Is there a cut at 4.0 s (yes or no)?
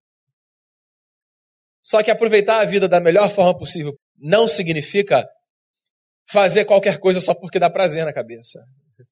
yes